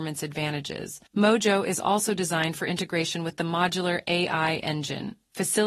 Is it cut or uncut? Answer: cut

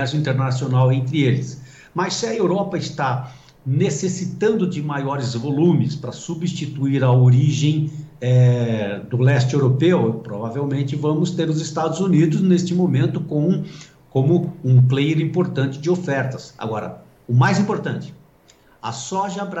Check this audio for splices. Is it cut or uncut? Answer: uncut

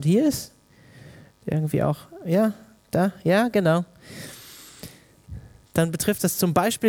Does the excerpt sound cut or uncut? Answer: uncut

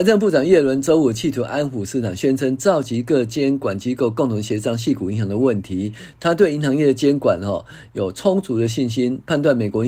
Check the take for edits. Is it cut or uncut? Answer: uncut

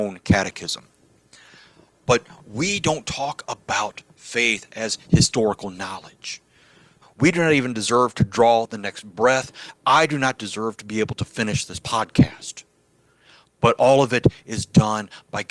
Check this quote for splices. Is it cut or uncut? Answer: cut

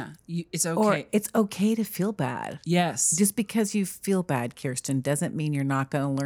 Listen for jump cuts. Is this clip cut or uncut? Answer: uncut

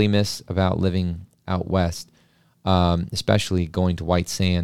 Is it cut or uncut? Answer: uncut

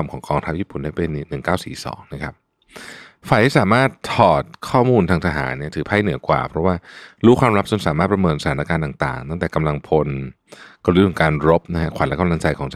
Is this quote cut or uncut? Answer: uncut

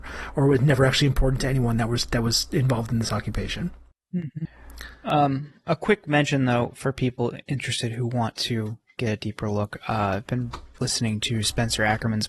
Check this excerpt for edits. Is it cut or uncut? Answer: uncut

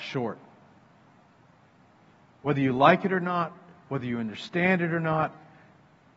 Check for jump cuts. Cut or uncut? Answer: uncut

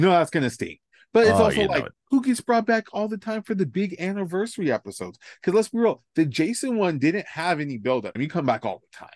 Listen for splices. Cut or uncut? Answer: cut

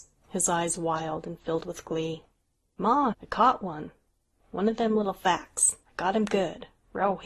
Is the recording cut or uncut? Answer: cut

